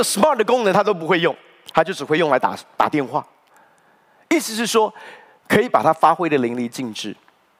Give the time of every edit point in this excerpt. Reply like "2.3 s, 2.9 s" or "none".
5.4 s